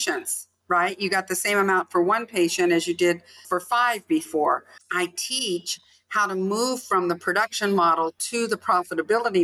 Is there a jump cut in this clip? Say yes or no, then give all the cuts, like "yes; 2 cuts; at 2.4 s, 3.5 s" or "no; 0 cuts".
yes; 1 cut; at 4.8 s